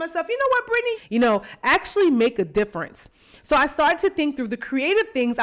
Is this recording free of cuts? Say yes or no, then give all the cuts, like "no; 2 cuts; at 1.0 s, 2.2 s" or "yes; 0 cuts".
no; 1 cut; at 0.9 s